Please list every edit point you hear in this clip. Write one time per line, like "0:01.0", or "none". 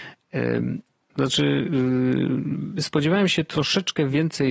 0:01.1